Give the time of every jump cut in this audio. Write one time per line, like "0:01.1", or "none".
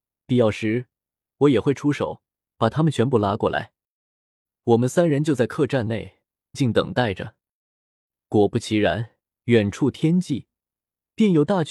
0:06.5
0:09.3